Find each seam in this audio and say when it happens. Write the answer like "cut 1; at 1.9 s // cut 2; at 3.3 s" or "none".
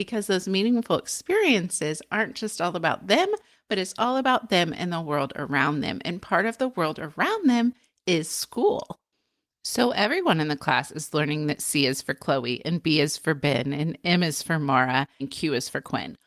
cut 1; at 15.2 s